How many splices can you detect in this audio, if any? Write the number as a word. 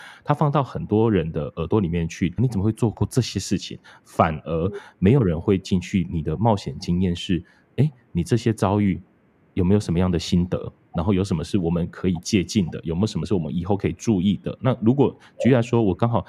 one